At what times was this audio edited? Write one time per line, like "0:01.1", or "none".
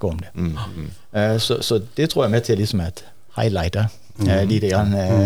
none